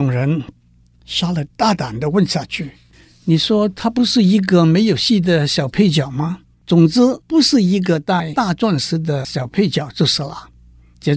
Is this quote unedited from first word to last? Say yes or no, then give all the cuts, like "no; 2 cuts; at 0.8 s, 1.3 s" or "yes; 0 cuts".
no; 1 cut; at 6.5 s